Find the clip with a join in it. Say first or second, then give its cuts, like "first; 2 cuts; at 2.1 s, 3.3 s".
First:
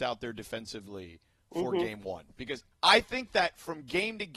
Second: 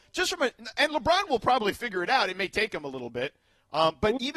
first; 1 cut; at 2.7 s